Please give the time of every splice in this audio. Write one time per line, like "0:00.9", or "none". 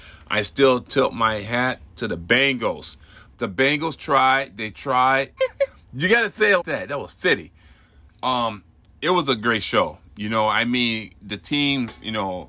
0:03.3
0:05.4
0:06.6